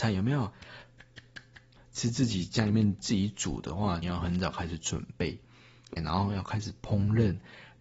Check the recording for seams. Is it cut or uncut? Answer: cut